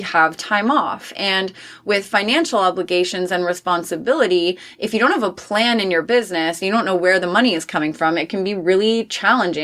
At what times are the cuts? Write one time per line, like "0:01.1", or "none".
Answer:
none